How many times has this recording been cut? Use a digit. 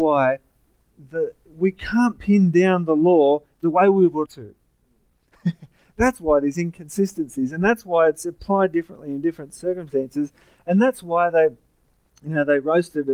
1